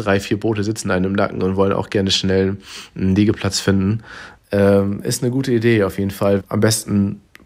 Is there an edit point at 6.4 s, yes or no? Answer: yes